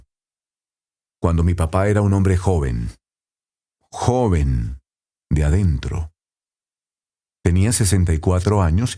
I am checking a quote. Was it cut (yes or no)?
no